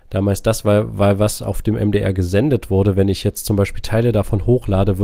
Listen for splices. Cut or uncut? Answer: uncut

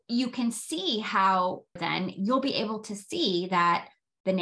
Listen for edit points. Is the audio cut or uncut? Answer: cut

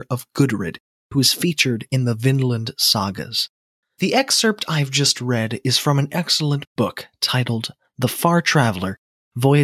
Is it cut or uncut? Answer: cut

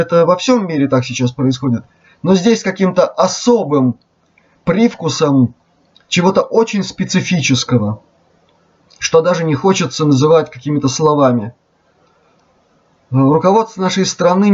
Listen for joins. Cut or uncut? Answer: uncut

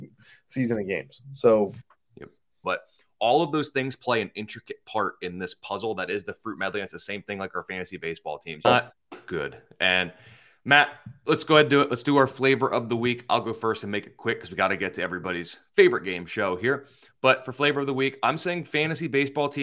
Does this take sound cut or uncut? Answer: cut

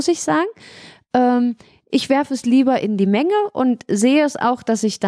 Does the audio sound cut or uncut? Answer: uncut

